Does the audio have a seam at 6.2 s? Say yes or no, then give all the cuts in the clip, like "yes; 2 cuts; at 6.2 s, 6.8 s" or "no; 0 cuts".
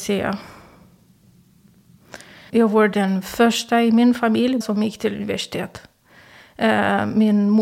no; 2 cuts; at 2.5 s, 4.6 s